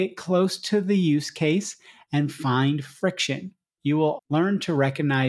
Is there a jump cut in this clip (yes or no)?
yes